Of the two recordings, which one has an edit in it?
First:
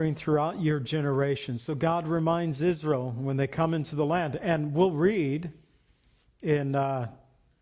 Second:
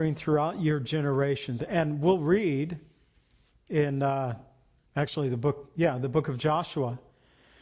second; 2 cuts; at 1.6 s, 4.9 s

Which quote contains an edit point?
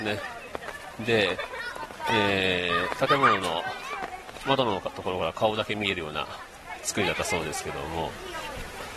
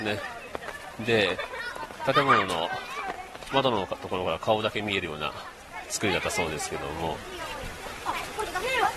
second; 1 cut; at 2.1 s

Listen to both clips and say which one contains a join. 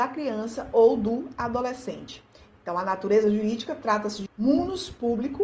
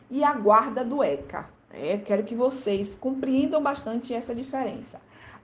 first; 1 cut; at 4.3 s

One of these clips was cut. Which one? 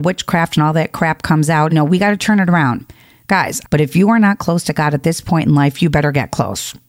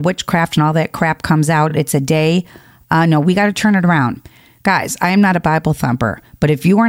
first; 2 cuts; at 1.7 s, 3.6 s

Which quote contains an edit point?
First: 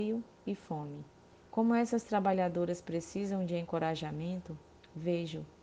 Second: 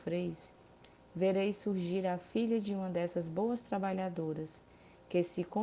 first; 1 cut; at 1.4 s

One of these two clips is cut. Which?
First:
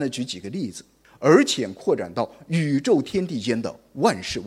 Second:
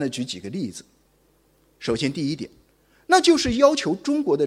first; 1 cut; at 1.0 s

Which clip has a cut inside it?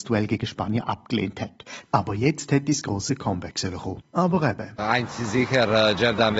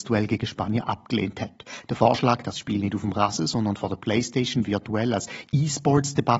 first; 1 cut; at 1.8 s

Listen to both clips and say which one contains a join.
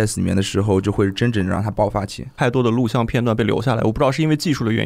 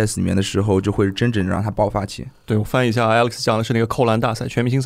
first; 1 cut; at 2.4 s

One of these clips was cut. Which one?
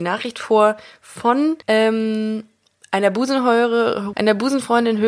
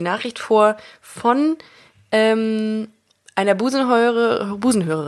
first; 2 cuts; at 1.6 s, 4.1 s

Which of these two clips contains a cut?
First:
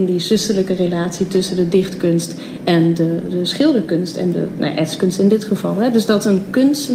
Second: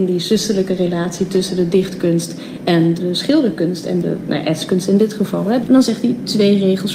second; 2 cuts; at 3.0 s, 5.6 s

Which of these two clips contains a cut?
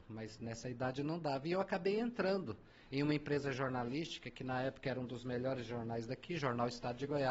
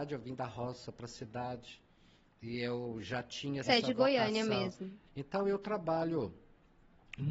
second; 2 cuts; at 3.6 s, 5.1 s

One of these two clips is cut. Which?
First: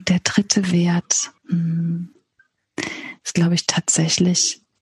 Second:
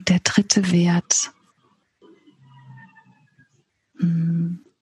first; 1 cut; at 1.4 s

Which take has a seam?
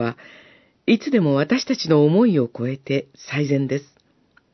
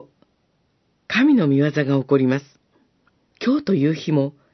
second; 1 cut; at 3.3 s

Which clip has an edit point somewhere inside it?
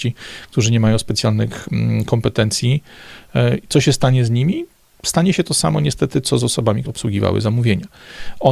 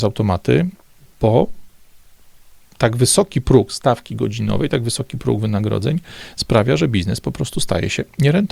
first; 1 cut; at 6.8 s

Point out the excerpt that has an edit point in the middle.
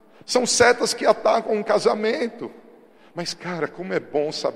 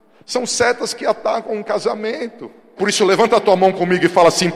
second; 1 cut; at 2.8 s

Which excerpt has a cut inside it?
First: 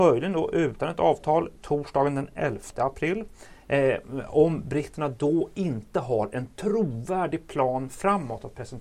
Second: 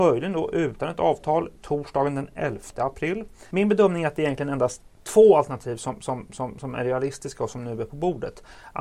second; 1 cut; at 3.5 s

